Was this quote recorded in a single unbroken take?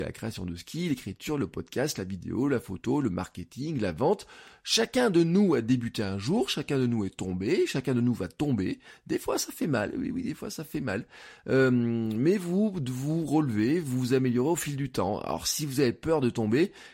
yes; 0 cuts

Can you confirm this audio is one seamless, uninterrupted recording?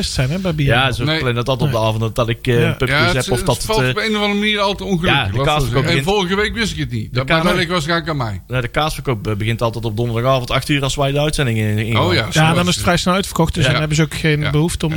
yes; 0 cuts

